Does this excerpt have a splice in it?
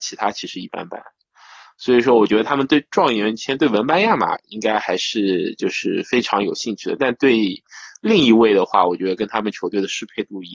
no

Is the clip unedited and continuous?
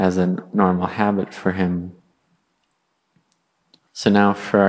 yes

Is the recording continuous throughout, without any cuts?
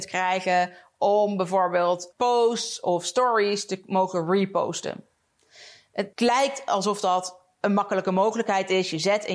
no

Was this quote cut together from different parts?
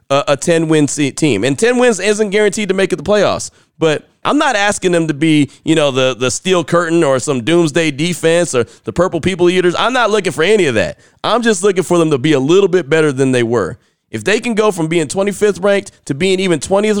yes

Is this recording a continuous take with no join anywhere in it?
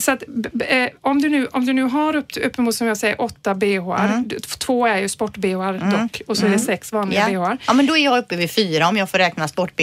yes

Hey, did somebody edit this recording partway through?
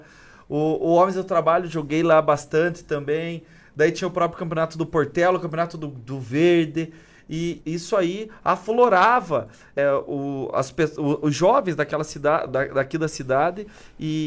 yes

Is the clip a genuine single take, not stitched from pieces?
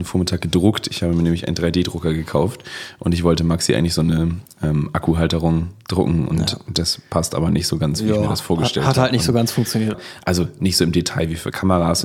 no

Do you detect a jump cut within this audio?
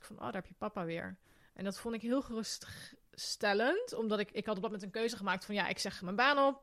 no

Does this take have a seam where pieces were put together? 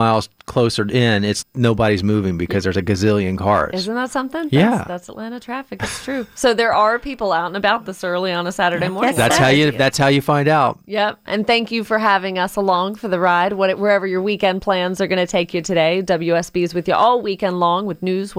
yes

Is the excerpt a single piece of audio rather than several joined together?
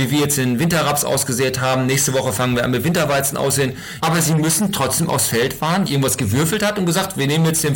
no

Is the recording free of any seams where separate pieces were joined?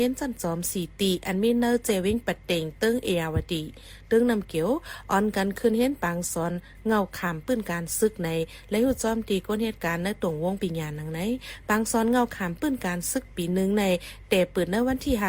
no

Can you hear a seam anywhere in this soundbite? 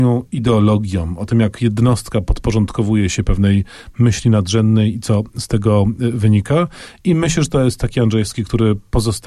no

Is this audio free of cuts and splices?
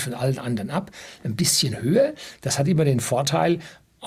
yes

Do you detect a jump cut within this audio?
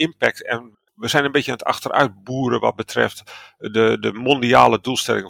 no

